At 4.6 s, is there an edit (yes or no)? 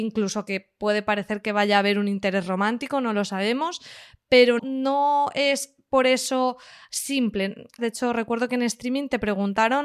yes